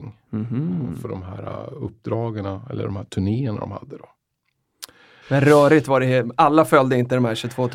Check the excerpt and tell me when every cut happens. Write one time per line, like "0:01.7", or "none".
0:05.2